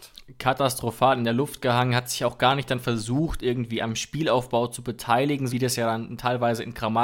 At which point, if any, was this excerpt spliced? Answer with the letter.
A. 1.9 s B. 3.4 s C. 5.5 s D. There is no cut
C